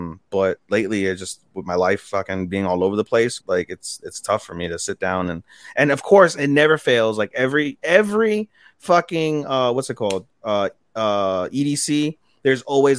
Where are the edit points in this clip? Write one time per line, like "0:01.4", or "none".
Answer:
0:03.4